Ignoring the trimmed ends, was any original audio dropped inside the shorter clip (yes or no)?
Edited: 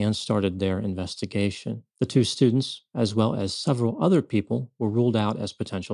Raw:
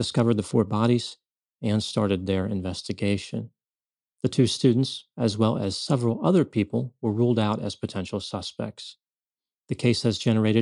yes